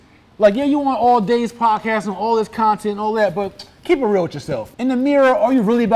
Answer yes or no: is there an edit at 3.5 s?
no